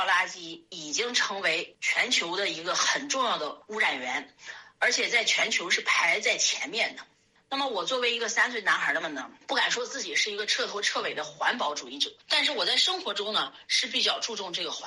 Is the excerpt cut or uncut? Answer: cut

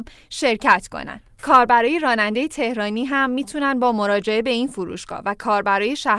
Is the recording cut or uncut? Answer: cut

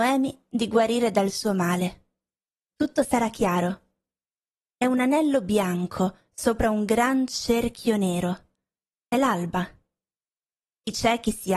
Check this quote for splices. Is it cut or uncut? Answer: cut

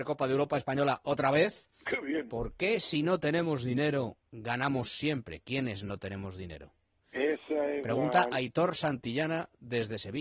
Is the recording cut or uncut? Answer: cut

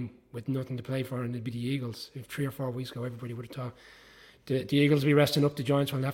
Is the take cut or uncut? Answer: uncut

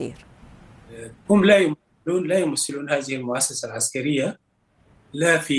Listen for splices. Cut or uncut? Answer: cut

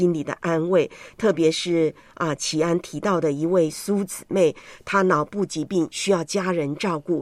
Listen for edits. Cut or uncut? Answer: uncut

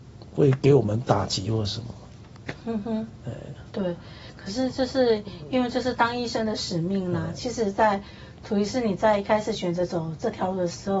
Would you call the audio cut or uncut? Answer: uncut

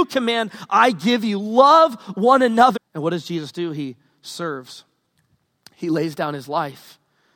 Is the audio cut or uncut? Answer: cut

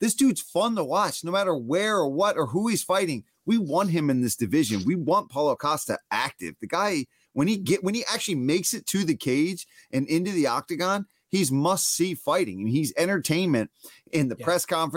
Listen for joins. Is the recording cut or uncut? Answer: uncut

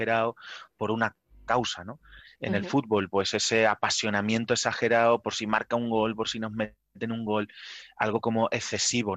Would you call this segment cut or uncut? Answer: cut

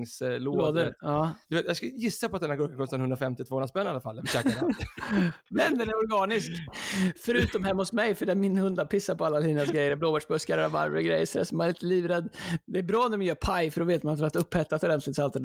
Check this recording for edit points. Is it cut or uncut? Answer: cut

